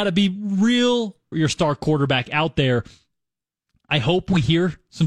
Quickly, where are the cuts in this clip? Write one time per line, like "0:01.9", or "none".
0:01.3